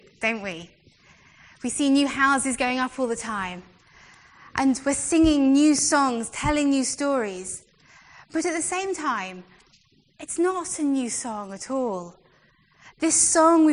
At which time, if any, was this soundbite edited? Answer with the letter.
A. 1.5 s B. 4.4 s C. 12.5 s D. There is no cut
D